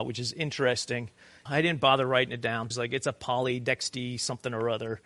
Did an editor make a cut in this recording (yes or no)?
yes